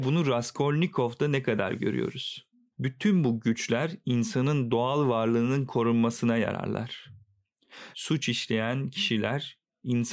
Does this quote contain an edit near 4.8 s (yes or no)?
no